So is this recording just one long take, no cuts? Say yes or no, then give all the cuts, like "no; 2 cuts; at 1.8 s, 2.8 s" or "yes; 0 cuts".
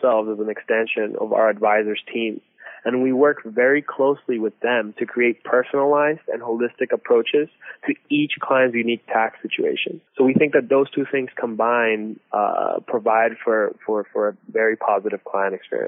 no; 1 cut; at 10.1 s